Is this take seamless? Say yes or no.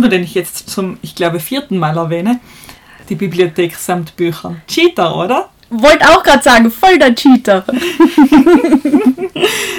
no